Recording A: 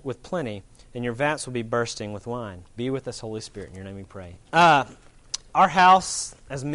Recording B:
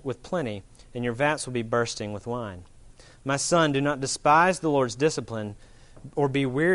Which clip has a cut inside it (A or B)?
A